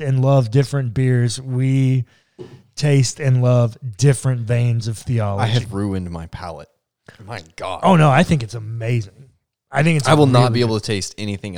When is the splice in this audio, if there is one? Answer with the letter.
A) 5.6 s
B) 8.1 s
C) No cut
A